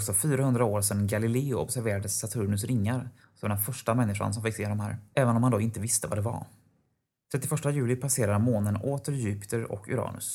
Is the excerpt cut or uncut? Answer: uncut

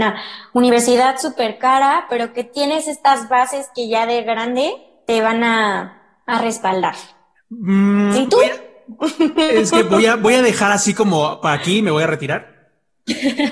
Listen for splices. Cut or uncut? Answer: cut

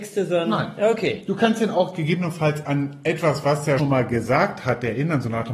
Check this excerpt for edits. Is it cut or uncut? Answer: cut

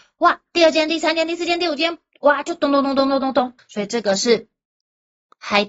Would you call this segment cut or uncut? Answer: cut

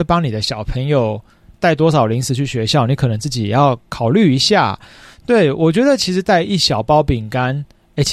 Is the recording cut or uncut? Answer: uncut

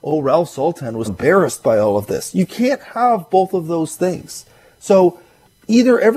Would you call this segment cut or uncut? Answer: cut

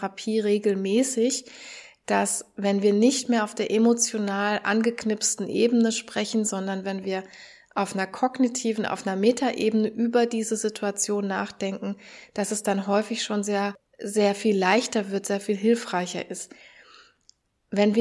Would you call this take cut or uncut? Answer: uncut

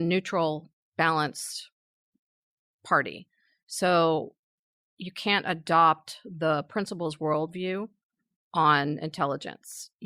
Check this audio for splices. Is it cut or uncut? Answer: uncut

